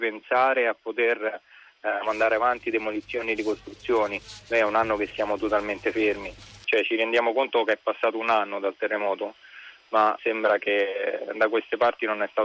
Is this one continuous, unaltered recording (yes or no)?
no